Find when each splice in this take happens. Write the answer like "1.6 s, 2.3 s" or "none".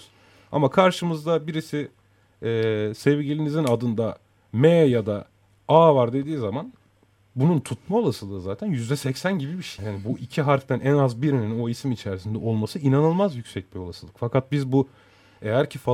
9.8 s